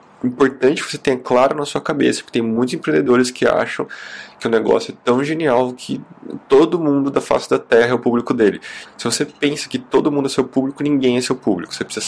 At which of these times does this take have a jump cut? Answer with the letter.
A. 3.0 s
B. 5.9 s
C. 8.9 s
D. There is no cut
C